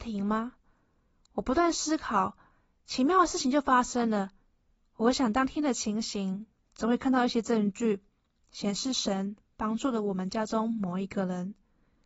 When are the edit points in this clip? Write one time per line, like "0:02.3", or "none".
none